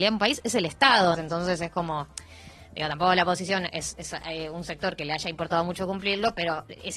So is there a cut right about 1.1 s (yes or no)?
yes